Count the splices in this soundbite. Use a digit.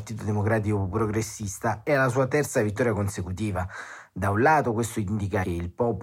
0